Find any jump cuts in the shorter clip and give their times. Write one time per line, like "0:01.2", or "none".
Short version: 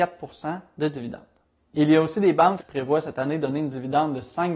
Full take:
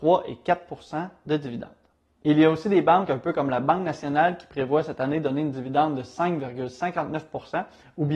0:02.6